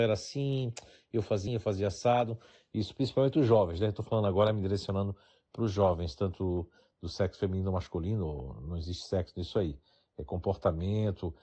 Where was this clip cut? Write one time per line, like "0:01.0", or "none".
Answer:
0:01.5